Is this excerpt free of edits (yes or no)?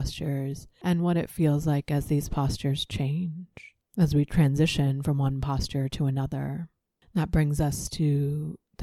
yes